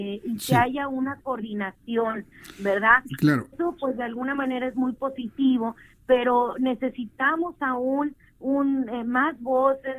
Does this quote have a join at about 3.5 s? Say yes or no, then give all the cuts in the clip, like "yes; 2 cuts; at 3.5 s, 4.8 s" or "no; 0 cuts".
yes; 1 cut; at 3.5 s